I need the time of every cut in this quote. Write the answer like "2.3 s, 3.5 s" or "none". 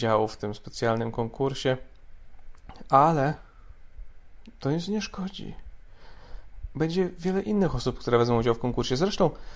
none